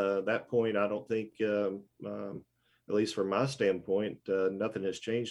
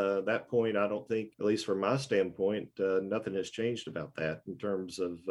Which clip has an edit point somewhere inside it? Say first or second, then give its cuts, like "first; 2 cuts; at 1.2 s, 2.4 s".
second; 1 cut; at 1.3 s